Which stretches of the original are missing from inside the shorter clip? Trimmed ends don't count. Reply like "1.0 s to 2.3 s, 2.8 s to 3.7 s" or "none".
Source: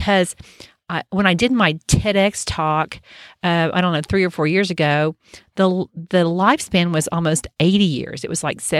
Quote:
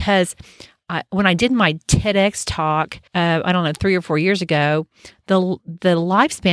3.1 s to 3.4 s